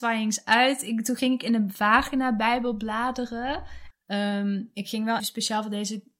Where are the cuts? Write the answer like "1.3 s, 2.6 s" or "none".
3.9 s, 5.2 s